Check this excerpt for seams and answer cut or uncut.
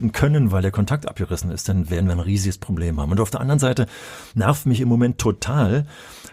uncut